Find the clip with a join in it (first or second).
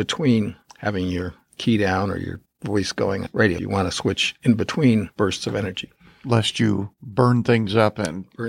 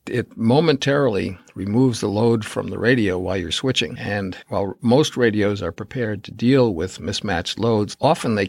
first